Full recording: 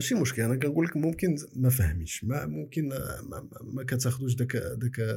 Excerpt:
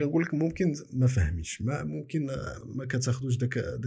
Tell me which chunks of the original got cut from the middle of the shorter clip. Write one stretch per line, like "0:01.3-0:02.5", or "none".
0:03.2-0:03.6